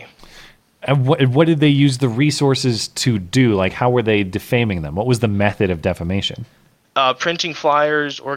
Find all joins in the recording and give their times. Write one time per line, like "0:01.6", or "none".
none